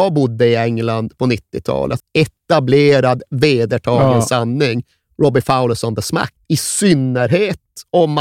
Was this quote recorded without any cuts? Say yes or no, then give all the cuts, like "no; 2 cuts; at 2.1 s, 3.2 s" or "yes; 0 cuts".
no; 2 cuts; at 2.0 s, 6.4 s